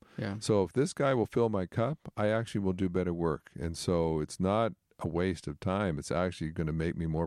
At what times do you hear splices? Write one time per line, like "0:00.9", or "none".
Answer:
none